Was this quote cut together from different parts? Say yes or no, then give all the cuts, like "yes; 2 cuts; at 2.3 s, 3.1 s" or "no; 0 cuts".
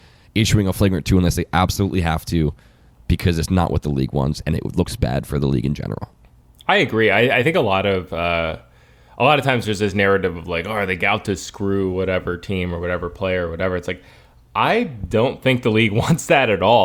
no; 0 cuts